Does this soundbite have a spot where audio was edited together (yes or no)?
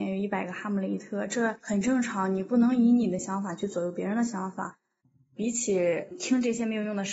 no